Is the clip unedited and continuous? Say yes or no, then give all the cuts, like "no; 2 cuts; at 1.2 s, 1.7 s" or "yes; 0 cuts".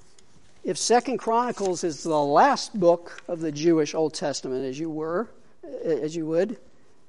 yes; 0 cuts